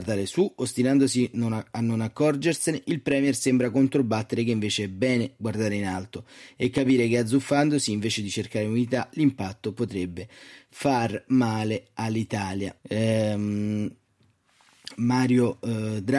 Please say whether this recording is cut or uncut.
cut